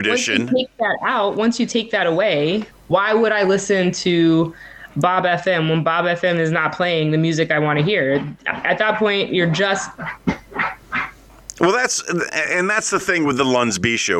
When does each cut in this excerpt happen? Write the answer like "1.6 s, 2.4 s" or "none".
2.7 s